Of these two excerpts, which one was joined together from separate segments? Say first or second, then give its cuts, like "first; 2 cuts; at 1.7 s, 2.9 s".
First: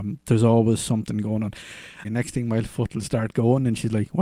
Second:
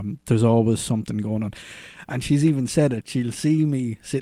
first; 1 cut; at 2.0 s